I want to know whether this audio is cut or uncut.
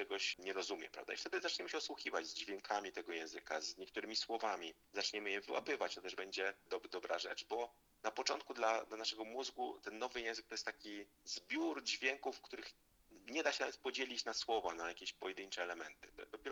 cut